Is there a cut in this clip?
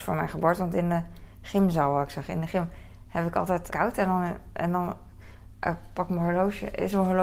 yes; 1 cut; at 3.7 s

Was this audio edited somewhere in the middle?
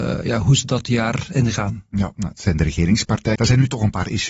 yes; 1 cut; at 3.3 s

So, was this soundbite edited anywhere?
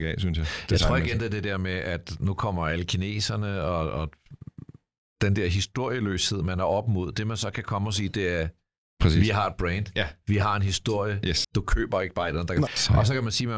yes; 2 cuts; at 11.4 s, 12.7 s

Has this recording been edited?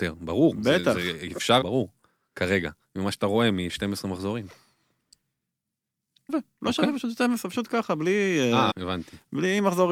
yes; 3 cuts; at 1.6 s, 6.3 s, 8.7 s

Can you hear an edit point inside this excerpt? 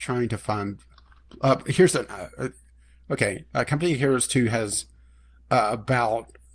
no; 0 cuts

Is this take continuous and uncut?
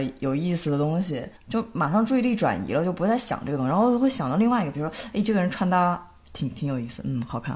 no; 1 cut; at 1.4 s

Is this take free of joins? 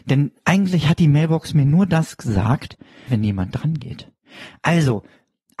no; 1 cut; at 3.1 s

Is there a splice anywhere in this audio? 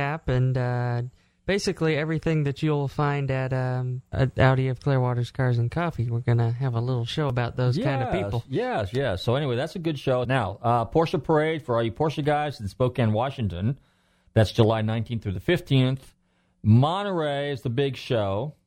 yes; 1 cut; at 10.2 s

